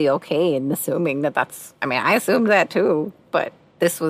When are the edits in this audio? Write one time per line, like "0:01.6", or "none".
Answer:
none